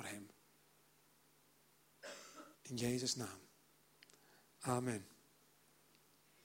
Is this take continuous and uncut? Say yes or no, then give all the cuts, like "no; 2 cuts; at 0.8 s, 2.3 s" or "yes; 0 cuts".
no; 1 cut; at 2.5 s